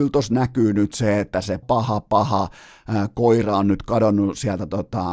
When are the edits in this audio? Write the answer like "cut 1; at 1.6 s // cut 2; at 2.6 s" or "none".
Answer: cut 1; at 1.6 s